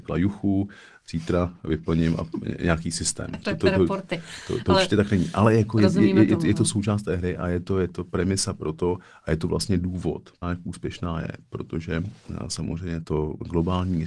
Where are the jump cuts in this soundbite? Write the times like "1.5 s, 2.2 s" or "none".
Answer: 10.4 s, 13.0 s